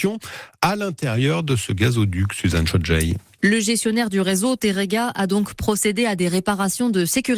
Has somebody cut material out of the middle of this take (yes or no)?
no